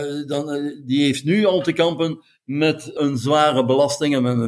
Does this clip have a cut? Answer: yes; 1 cut; at 3.0 s

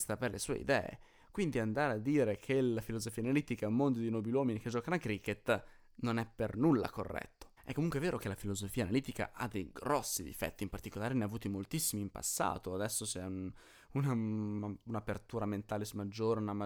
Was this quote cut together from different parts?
yes; 1 cut; at 7.6 s

